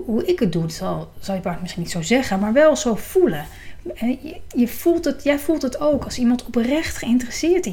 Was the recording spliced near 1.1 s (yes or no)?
no